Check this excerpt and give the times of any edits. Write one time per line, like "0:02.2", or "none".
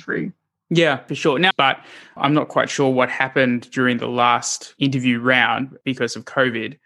0:01.5